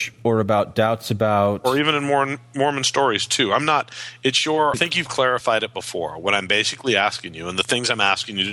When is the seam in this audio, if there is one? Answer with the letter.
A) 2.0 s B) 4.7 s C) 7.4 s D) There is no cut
B